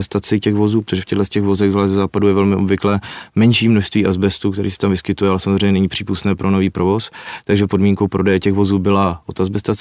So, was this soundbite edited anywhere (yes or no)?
no